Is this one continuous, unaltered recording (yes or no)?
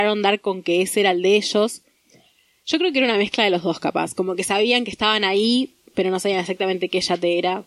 yes